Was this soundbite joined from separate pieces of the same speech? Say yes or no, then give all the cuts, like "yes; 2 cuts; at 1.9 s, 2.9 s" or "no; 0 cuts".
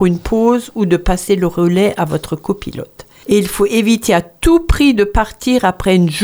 no; 0 cuts